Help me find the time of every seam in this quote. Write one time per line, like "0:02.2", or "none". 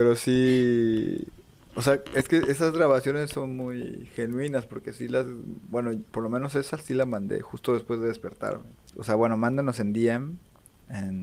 0:08.9

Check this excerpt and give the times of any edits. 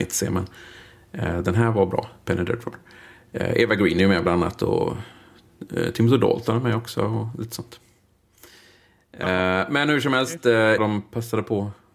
0:10.8

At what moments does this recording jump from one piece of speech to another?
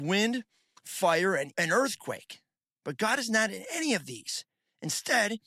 0:01.5

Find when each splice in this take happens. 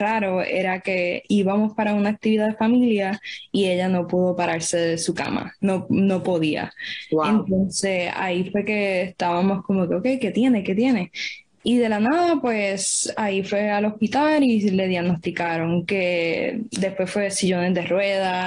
none

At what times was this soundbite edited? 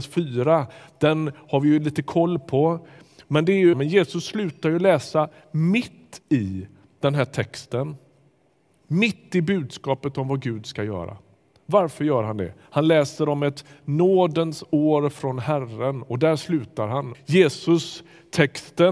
0:03.7
0:17.1

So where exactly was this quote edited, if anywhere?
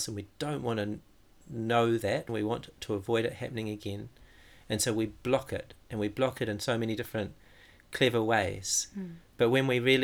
0:02.3

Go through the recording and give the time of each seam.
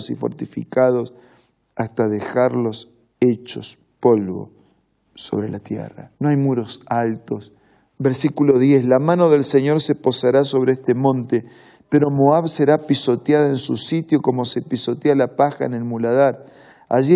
0:06.1
0:07.9

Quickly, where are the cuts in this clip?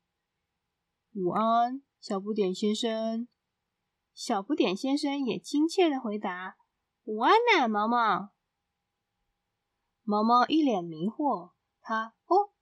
0:08.5

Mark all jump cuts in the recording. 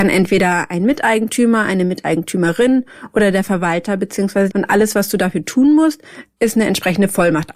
0:04.5

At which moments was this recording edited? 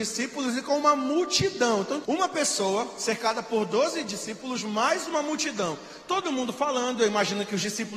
0:02.0

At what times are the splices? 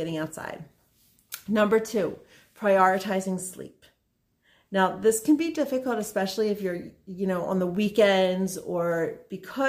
none

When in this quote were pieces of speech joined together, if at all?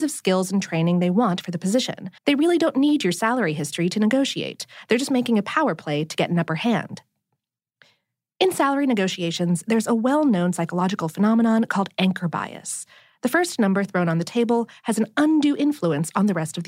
0:02.2

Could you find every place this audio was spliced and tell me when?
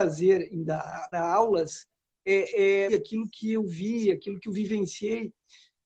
0:01.1
0:02.9

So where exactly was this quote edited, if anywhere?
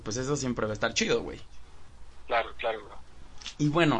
none

